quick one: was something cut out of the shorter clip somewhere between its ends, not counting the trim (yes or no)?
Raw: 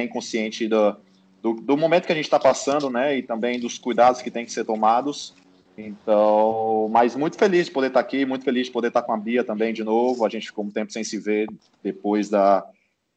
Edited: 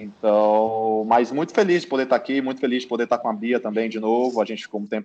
no